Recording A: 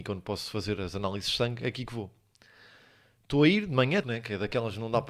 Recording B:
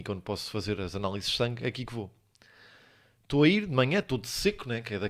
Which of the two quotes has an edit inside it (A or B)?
A